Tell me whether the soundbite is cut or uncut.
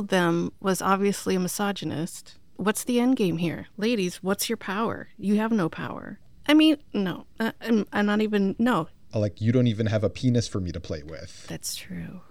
cut